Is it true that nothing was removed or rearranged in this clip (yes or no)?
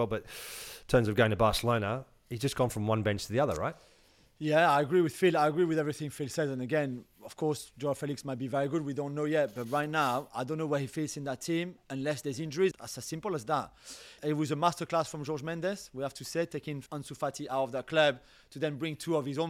no